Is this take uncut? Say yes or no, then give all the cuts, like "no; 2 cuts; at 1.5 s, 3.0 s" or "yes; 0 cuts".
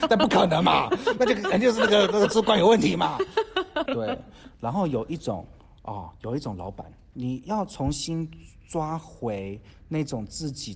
no; 2 cuts; at 3.9 s, 7.1 s